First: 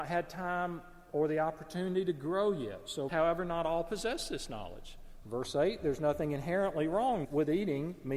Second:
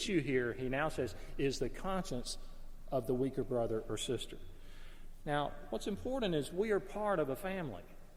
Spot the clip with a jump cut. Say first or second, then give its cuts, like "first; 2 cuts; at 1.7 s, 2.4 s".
first; 3 cuts; at 3.1 s, 5.2 s, 7.2 s